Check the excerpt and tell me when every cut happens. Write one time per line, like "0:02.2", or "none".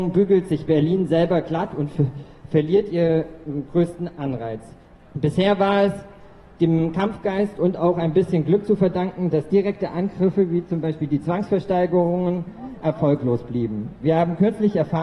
0:05.0